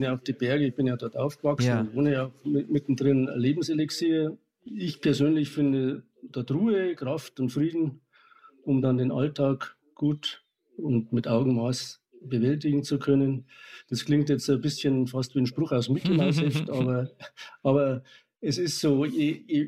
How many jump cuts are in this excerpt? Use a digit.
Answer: 0